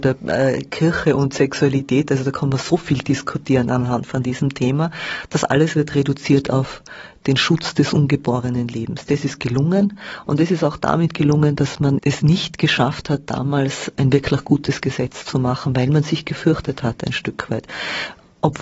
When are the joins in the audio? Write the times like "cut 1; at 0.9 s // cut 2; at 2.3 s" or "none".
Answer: cut 1; at 12.0 s